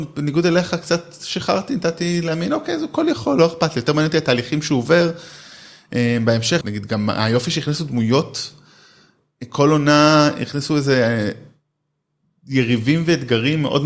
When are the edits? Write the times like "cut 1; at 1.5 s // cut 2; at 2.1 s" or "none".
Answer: cut 1; at 6.6 s

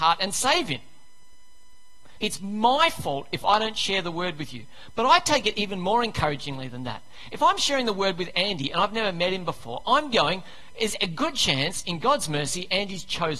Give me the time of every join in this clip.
cut 1; at 2.2 s

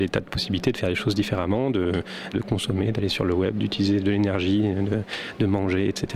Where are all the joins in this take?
cut 1; at 2.3 s

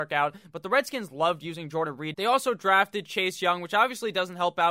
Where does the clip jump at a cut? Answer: cut 1; at 2.1 s

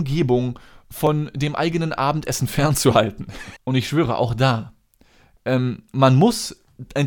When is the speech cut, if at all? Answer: cut 1; at 3.6 s

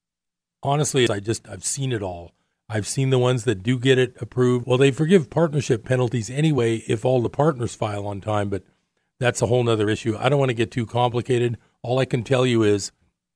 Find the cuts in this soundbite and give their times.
cut 1; at 1.1 s // cut 2; at 2.5 s // cut 3; at 4.6 s

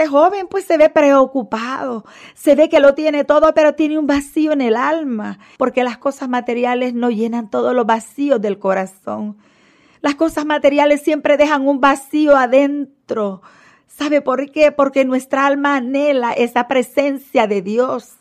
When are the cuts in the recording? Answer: cut 1; at 5.6 s

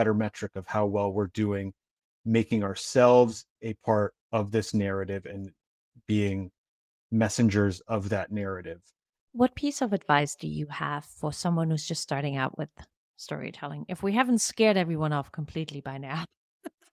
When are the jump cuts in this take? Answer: cut 1; at 9.2 s

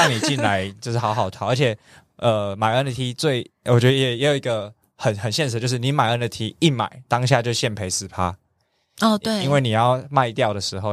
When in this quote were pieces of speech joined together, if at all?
none

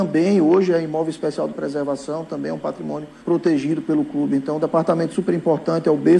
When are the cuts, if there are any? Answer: none

